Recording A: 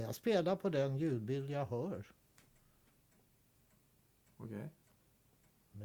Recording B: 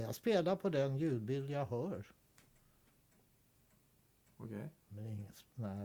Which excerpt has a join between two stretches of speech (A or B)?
B